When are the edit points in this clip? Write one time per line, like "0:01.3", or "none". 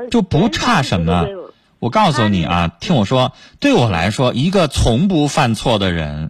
none